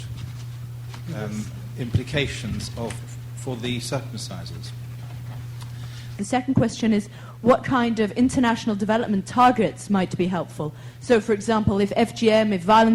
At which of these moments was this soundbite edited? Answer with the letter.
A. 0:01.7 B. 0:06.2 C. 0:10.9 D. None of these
B